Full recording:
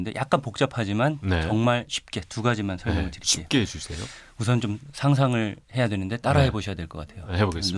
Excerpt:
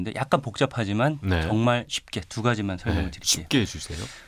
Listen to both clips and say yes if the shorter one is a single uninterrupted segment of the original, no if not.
yes